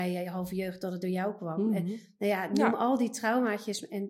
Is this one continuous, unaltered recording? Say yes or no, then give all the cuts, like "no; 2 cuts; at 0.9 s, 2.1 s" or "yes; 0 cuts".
yes; 0 cuts